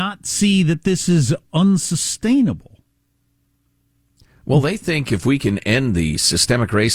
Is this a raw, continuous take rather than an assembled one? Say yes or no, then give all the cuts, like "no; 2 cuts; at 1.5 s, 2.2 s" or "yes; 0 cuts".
yes; 0 cuts